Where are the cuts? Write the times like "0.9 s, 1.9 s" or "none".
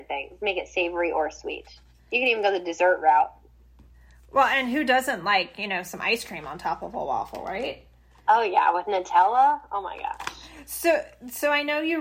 none